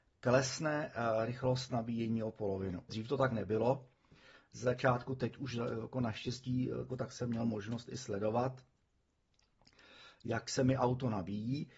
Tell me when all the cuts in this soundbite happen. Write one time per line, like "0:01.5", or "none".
0:02.9
0:06.9